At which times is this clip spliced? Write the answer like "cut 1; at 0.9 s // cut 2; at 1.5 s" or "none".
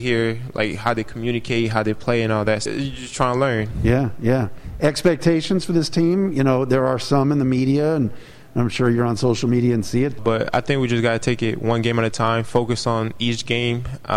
cut 1; at 2.7 s // cut 2; at 10.2 s

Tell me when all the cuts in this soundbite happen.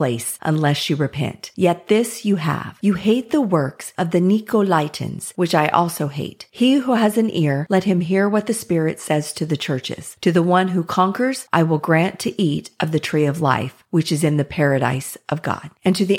none

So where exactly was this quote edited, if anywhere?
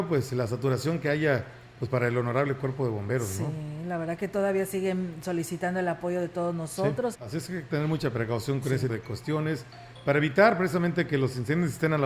cut 1; at 7.1 s // cut 2; at 8.9 s

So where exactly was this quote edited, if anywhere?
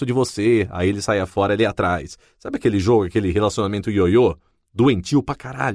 none

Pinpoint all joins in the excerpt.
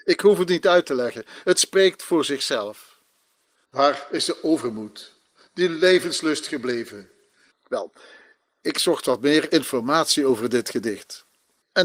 cut 1; at 3.6 s // cut 2; at 7.5 s

